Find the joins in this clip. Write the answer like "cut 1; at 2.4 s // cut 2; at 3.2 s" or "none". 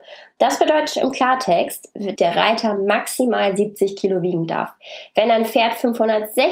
cut 1; at 2.2 s